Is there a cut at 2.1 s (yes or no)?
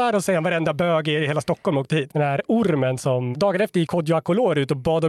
yes